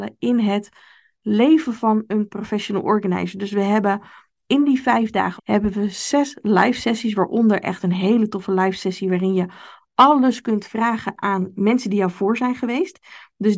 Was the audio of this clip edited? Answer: yes; 1 cut; at 5.4 s

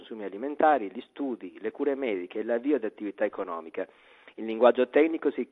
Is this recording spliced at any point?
no; 0 cuts

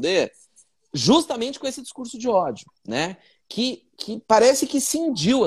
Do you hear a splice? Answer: yes; 1 cut; at 2.8 s

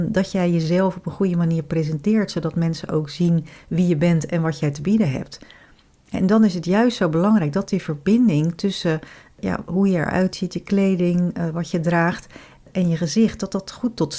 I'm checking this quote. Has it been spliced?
no; 0 cuts

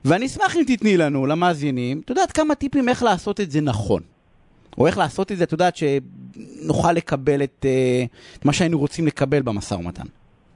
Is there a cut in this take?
no; 0 cuts

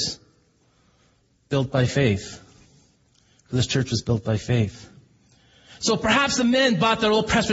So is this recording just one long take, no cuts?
no; 1 cut; at 5.8 s

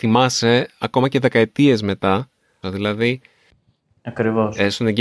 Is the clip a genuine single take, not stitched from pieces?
no; 1 cut; at 2.6 s

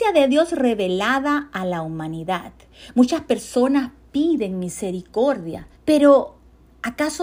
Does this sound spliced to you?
yes; 1 cut; at 5.7 s

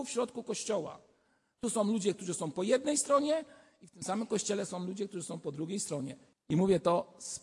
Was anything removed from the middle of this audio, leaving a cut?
yes; 1 cut; at 6.3 s

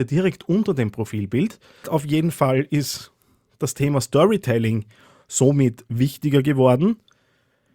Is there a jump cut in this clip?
yes; 1 cut; at 1.8 s

